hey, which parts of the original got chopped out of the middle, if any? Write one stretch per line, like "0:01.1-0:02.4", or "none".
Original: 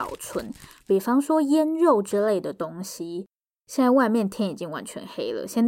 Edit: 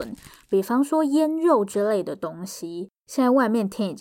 0:03.4-0:03.6